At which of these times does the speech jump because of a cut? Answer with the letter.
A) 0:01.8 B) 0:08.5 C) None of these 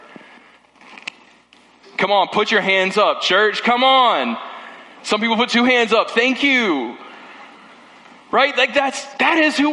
A